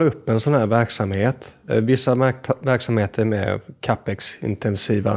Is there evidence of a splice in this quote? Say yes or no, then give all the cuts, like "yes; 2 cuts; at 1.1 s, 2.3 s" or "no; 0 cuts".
no; 0 cuts